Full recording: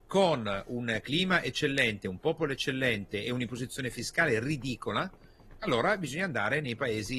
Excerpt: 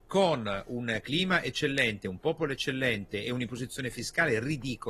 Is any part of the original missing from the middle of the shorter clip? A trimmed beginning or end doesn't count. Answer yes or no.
no